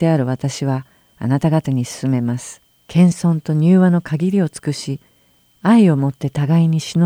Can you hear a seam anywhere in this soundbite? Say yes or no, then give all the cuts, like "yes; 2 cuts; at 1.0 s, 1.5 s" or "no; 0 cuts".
yes; 2 cuts; at 2.8 s, 5.5 s